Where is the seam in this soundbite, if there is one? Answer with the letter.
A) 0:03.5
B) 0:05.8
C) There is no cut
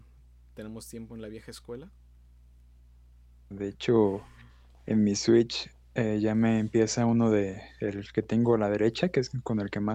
A